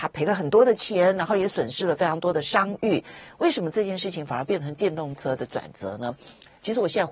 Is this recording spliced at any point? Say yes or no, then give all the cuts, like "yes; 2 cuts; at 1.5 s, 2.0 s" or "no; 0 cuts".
no; 0 cuts